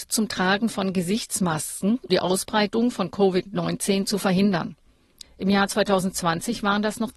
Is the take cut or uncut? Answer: cut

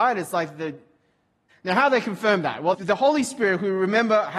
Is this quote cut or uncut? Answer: cut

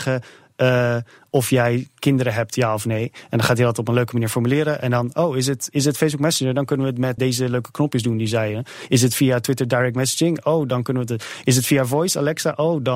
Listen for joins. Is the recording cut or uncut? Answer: cut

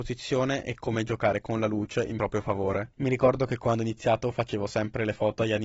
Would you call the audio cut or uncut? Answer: uncut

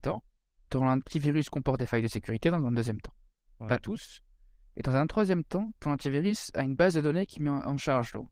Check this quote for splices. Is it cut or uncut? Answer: uncut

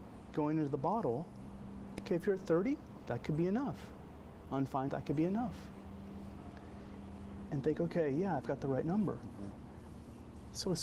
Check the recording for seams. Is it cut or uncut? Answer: cut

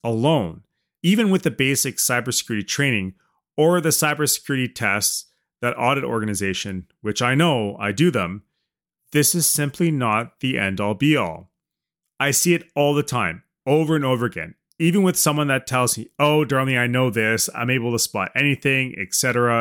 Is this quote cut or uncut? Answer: cut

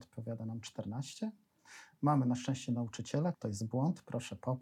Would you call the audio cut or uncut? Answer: cut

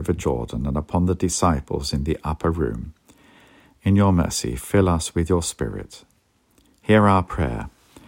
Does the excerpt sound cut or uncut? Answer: uncut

